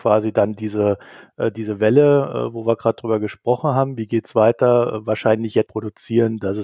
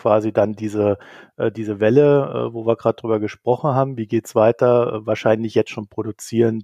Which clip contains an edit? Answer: first; 1 cut; at 5.7 s

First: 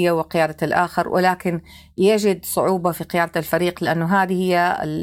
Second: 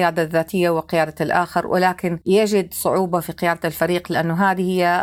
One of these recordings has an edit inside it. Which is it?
second; 1 cut; at 2.2 s

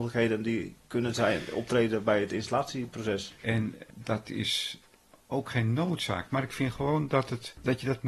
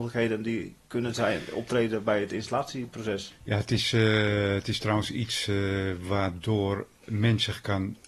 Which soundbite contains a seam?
first; 1 cut; at 3.4 s

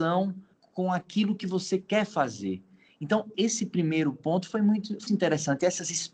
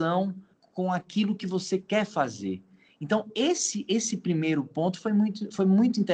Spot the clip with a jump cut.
first; 2 cuts; at 3.3 s, 5.1 s

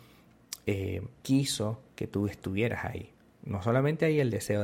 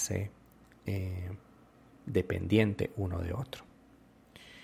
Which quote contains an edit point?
first; 1 cut; at 1.2 s

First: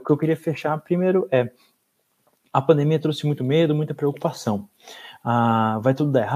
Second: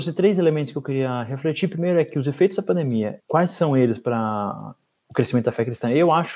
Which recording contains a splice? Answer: second; 1 cut; at 3.2 s

